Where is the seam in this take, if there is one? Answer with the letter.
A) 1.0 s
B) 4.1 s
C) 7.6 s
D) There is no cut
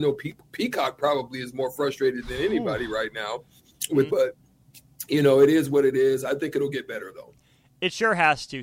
B